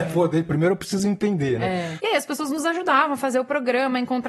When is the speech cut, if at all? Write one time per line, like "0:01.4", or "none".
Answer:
0:02.0